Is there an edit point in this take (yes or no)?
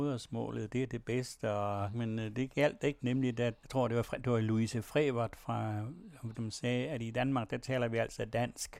yes